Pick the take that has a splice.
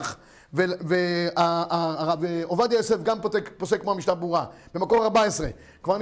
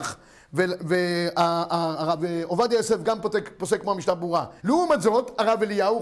second; 1 cut; at 4.6 s

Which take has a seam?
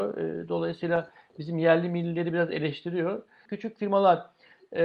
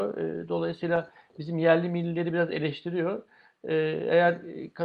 first; 1 cut; at 3.5 s

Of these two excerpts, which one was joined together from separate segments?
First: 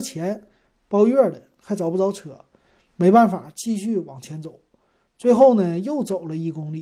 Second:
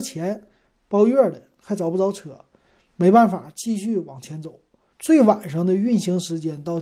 second; 1 cut; at 4.9 s

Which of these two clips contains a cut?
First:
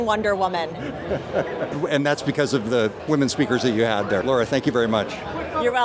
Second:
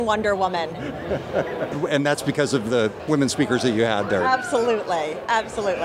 first; 1 cut; at 4.2 s

